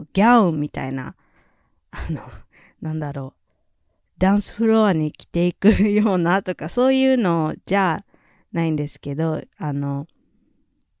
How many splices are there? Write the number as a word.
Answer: zero